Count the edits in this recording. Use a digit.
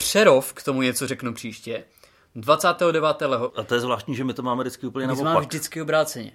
1